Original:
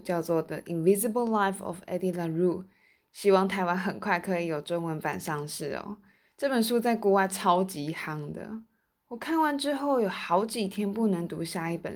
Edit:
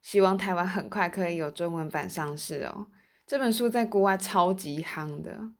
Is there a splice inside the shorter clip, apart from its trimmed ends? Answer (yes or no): no